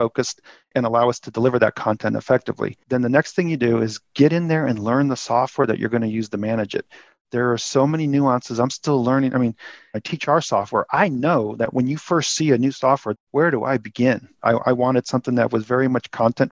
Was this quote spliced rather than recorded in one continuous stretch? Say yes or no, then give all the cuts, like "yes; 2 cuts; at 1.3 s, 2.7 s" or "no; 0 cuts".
yes; 3 cuts; at 9.9 s, 13.1 s, 14.4 s